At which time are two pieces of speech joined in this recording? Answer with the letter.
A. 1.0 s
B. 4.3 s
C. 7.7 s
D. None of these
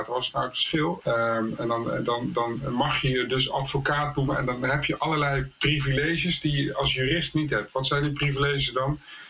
A